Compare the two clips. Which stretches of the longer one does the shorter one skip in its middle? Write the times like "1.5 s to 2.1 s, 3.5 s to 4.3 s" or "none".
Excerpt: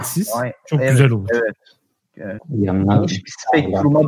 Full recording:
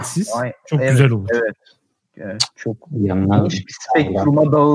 2.4 s to 2.8 s